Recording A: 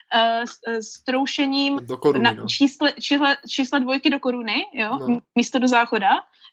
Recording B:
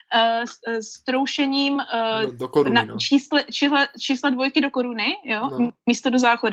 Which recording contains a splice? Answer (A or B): A